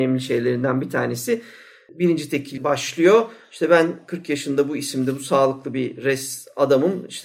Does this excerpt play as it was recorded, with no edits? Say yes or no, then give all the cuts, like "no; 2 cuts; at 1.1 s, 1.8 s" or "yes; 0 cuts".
yes; 0 cuts